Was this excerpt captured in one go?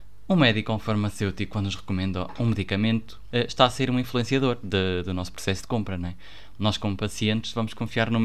no; 1 cut; at 3.3 s

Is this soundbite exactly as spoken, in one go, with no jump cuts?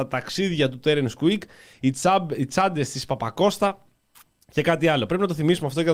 yes; 0 cuts

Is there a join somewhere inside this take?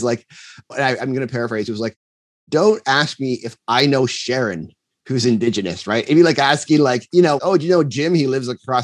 yes; 1 cut; at 7.4 s

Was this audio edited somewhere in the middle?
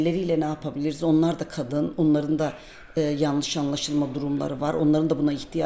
no; 0 cuts

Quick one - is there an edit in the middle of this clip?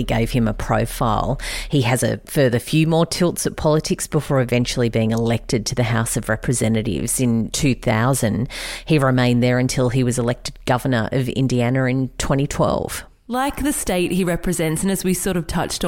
no; 0 cuts

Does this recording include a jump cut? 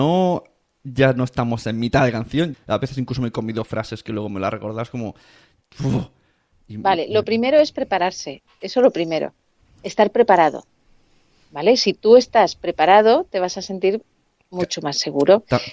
yes; 1 cut; at 2.5 s

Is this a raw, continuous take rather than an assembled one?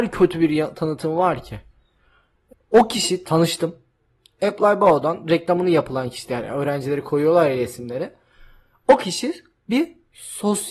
no; 1 cut; at 2.5 s

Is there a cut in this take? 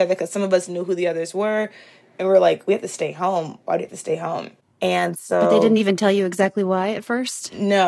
no; 0 cuts

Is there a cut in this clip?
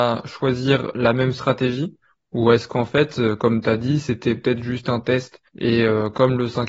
yes; 1 cut; at 5.5 s

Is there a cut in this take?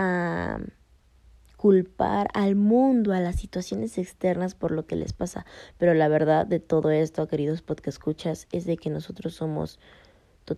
no; 0 cuts

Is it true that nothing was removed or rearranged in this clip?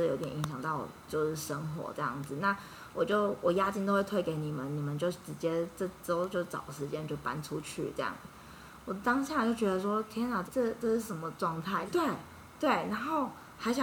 no; 2 cuts; at 10.5 s, 11.9 s

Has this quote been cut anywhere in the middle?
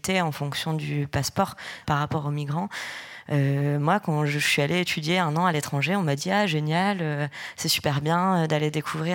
yes; 1 cut; at 1.8 s

